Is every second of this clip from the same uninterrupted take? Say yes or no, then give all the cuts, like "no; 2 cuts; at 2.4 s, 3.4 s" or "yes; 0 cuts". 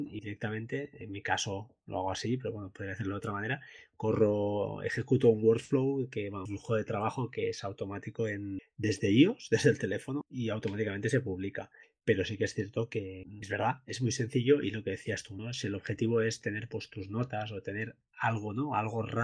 no; 1 cut; at 13.4 s